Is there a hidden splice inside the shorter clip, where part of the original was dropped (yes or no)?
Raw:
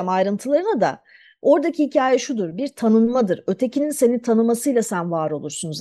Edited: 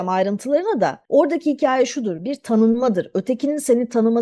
yes